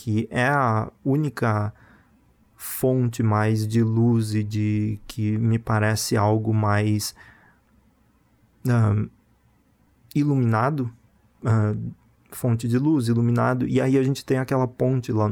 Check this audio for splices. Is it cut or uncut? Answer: uncut